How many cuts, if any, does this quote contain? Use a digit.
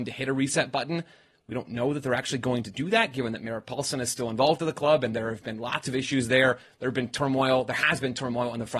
0